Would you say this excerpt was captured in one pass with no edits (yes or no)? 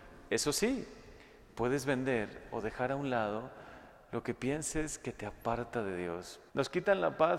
no